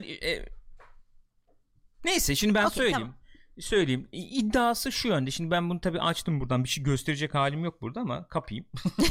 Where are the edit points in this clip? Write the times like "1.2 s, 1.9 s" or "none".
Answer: none